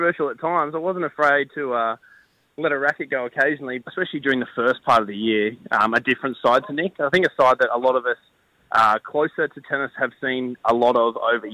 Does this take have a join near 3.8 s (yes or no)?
yes